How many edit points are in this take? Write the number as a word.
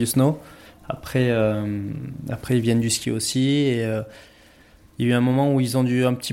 zero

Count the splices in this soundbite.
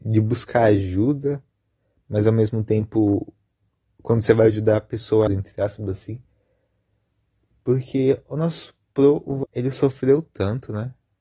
two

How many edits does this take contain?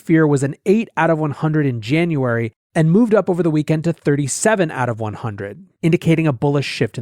zero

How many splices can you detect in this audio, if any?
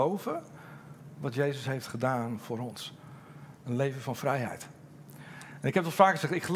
zero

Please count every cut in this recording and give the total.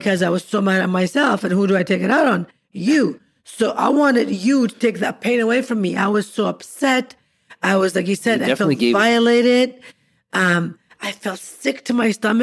zero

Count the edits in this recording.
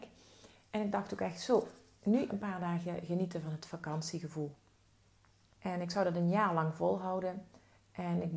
two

